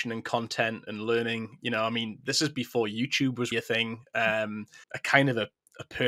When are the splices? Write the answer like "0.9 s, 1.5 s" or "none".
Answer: 3.5 s, 4.8 s